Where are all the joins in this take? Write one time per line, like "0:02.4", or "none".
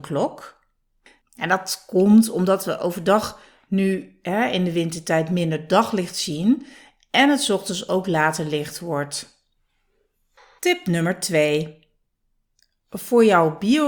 0:01.2